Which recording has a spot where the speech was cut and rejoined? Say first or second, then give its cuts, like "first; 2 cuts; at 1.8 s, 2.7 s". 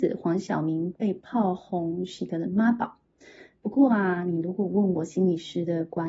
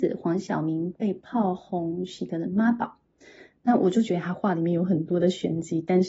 second; 1 cut; at 3.5 s